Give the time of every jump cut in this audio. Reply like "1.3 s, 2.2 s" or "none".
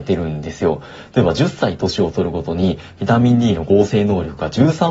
none